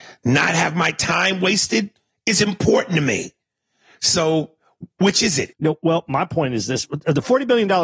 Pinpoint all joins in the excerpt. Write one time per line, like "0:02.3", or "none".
0:05.5